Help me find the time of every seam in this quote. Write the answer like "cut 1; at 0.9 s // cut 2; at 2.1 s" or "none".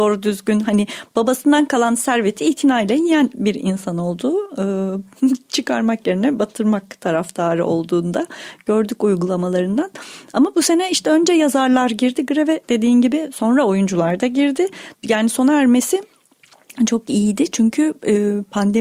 cut 1; at 14.9 s